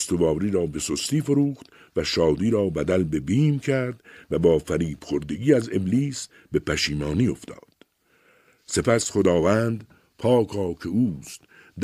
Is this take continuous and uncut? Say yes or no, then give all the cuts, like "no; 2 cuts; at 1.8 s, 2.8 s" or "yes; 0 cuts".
yes; 0 cuts